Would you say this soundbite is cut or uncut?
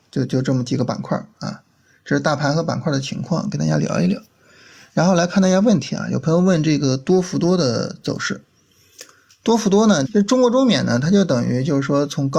cut